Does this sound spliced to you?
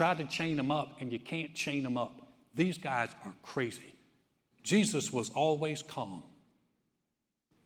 yes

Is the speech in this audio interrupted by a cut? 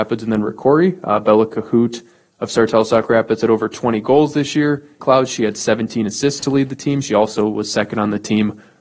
yes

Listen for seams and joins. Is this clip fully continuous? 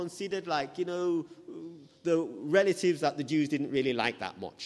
yes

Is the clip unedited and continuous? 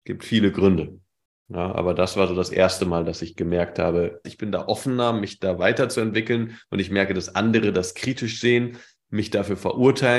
no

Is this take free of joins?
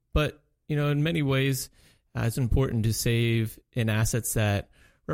no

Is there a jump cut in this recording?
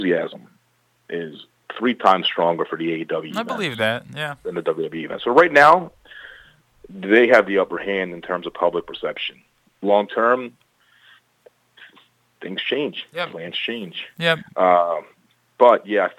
no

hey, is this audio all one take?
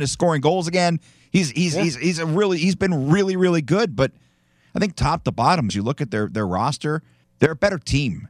no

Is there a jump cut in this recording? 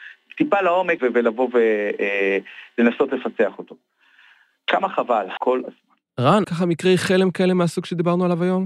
yes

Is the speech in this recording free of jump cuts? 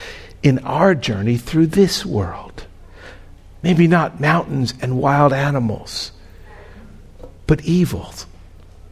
yes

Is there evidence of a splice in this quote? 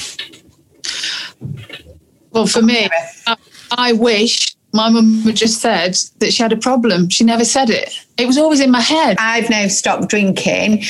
yes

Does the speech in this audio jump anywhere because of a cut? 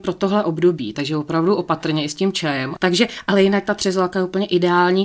yes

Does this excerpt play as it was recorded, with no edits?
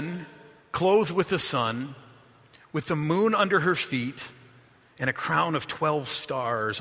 yes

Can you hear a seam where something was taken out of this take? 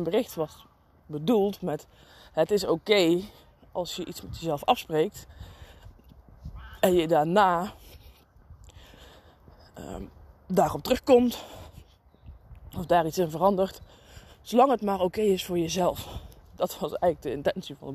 no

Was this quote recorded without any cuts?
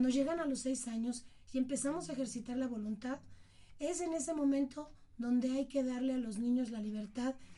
yes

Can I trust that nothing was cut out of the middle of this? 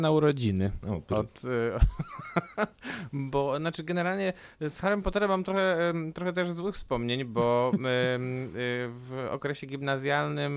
yes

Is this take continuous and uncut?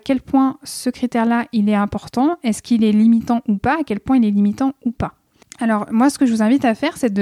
no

